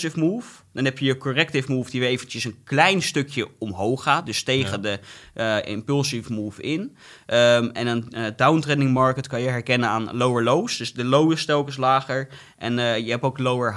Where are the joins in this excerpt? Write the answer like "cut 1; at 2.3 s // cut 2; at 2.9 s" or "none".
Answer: none